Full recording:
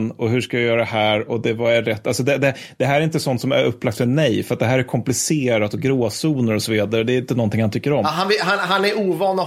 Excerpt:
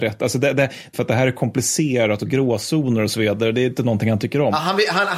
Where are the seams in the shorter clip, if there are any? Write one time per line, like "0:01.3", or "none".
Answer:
0:00.9